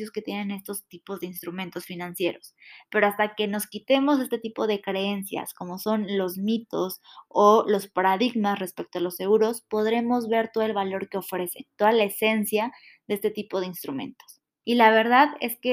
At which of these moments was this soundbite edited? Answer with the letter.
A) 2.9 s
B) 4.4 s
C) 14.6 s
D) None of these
C